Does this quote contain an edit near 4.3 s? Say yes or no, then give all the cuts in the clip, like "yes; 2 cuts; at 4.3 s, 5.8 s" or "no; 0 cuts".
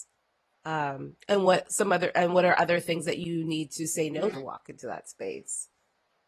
yes; 1 cut; at 4.3 s